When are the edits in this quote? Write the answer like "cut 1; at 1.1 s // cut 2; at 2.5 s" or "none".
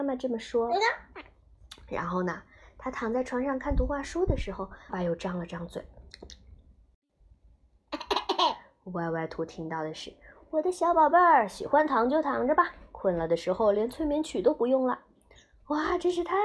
cut 1; at 1.1 s // cut 2; at 4.9 s